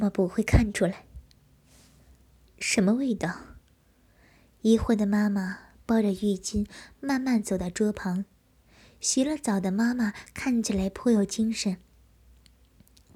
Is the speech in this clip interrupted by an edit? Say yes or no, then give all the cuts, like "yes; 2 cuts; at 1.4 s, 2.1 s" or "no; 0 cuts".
yes; 1 cut; at 2.5 s